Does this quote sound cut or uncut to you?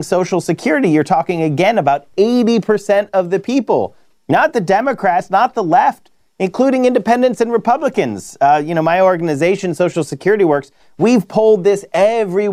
uncut